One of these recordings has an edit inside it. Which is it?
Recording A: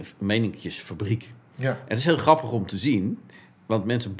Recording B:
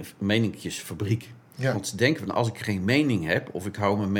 B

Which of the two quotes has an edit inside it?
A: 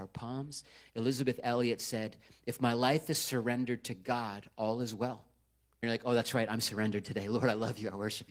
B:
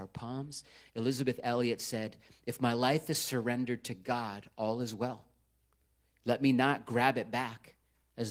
A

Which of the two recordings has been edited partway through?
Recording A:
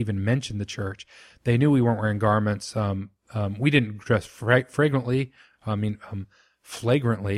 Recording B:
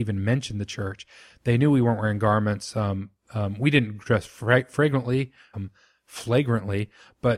B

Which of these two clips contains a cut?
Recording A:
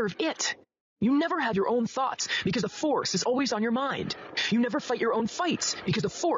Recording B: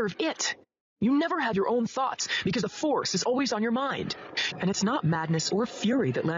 B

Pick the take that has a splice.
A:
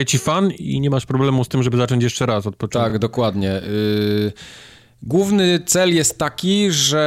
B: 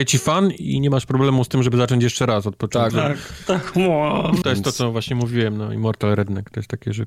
B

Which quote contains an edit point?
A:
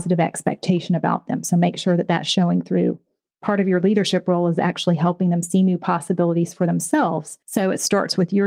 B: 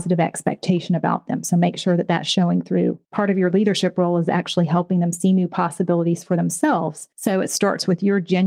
B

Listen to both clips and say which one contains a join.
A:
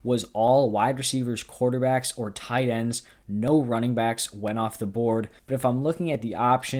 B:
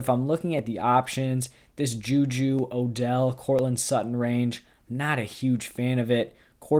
A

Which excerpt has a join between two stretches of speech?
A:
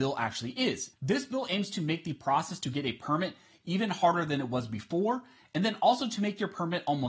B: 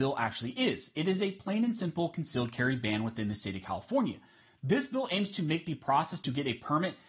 A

